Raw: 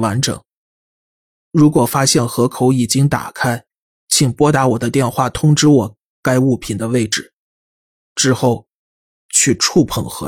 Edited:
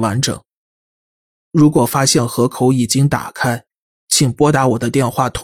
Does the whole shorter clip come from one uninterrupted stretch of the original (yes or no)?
yes